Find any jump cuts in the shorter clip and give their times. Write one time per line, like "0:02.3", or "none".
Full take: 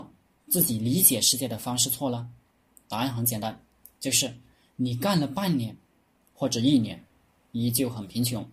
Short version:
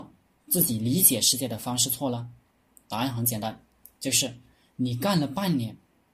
none